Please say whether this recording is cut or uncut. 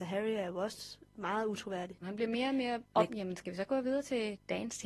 cut